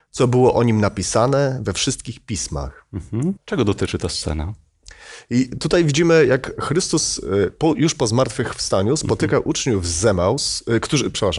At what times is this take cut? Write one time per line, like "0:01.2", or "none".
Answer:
0:03.4

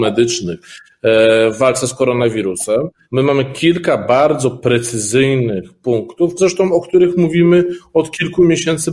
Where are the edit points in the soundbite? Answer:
0:03.0
0:06.4

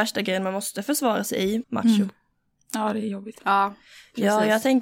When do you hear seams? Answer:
0:01.6
0:03.4

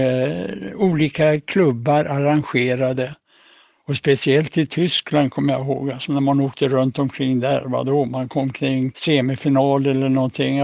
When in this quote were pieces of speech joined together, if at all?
none

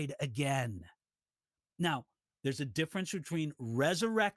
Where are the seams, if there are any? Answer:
0:02.4

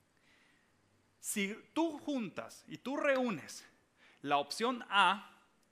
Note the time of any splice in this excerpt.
none

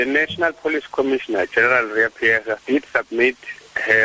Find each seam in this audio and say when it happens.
none

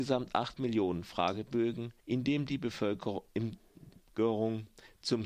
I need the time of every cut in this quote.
0:02.0

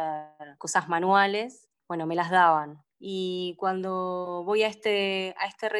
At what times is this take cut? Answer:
0:01.8

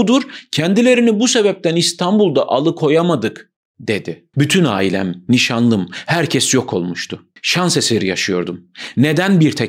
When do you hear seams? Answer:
0:04.3
0:07.4

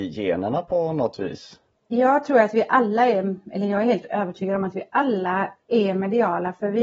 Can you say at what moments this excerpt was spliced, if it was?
none

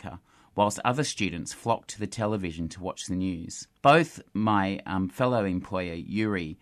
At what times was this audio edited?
0:03.8

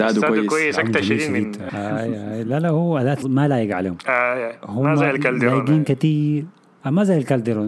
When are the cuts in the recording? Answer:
0:01.7
0:03.2

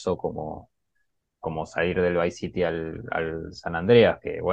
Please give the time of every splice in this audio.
none

